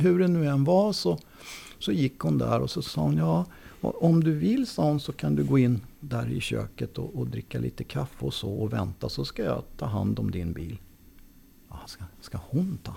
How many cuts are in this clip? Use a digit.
1